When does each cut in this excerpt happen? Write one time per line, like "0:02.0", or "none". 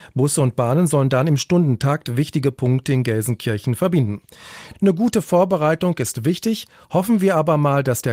none